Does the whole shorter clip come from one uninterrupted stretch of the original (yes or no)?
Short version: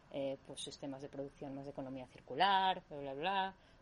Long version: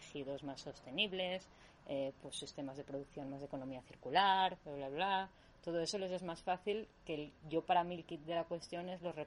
yes